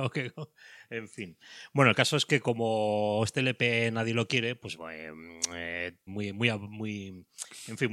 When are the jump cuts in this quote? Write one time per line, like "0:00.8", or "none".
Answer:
0:04.8
0:06.1